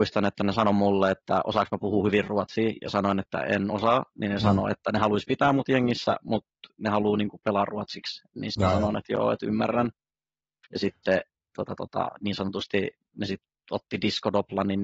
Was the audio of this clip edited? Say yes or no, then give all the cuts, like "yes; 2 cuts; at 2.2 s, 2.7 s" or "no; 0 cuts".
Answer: no; 0 cuts